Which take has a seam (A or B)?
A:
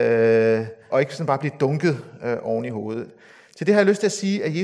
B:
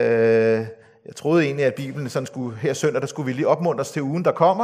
A